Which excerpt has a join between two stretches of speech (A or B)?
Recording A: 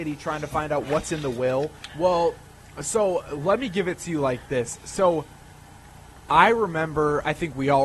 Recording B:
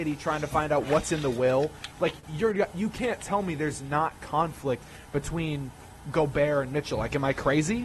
A